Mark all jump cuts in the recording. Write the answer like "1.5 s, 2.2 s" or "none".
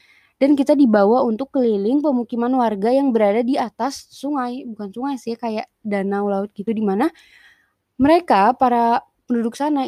none